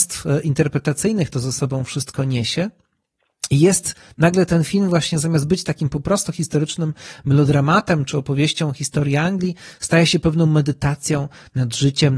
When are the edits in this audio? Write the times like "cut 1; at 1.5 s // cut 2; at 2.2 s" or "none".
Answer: none